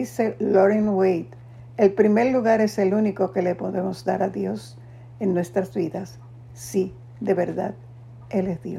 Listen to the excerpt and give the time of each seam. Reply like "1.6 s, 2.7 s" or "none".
none

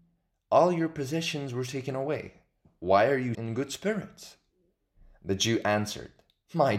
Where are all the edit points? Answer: 3.3 s

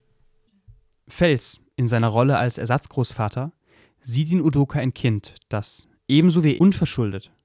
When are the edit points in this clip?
6.6 s

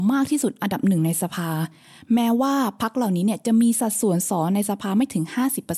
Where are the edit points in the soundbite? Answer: 4.3 s

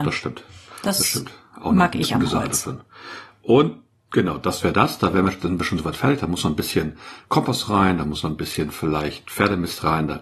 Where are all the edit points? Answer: none

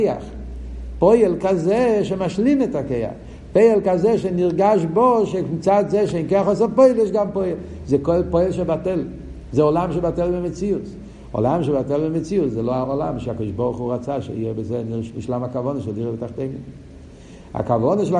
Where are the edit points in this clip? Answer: none

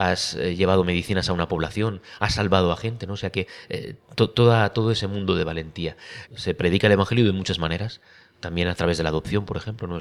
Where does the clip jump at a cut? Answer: 6.3 s

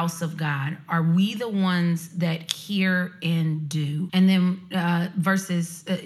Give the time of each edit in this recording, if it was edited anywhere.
4.1 s

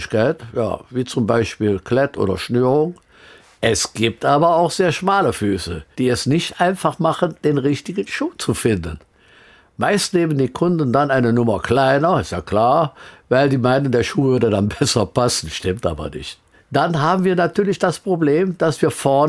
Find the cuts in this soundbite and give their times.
none

